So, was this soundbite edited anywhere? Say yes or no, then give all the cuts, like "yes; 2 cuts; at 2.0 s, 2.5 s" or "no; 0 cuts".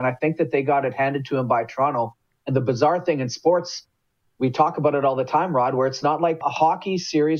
yes; 1 cut; at 6.4 s